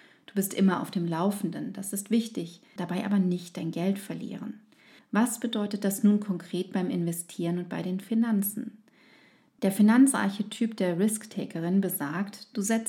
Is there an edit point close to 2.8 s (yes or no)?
yes